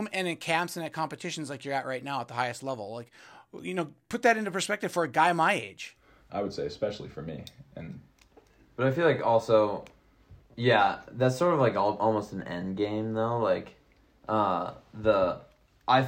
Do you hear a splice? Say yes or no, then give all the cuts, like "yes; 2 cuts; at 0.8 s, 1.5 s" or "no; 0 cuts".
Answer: yes; 1 cut; at 6.3 s